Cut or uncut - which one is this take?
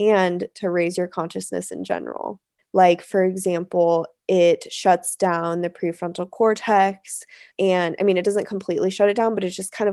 cut